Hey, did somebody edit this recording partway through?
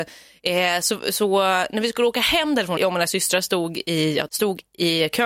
yes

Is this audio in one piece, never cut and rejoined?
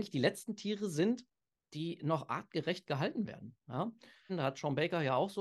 no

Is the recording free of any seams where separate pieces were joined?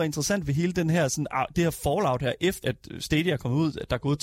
no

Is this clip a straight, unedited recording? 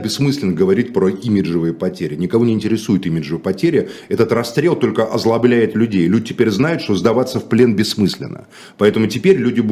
yes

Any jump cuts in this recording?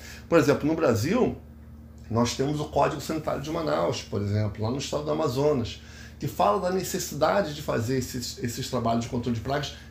no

